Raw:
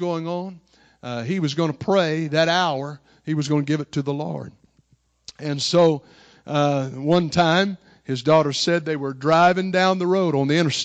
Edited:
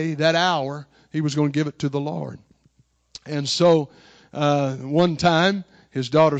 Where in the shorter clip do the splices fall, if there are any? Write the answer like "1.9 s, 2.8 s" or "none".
none